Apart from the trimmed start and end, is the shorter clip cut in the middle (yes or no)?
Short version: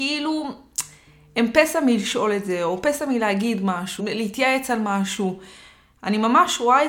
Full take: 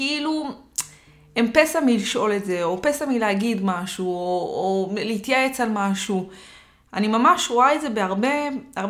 yes